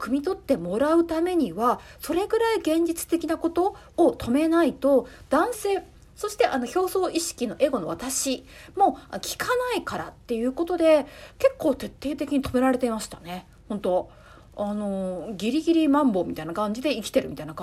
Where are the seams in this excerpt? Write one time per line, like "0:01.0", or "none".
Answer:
0:05.5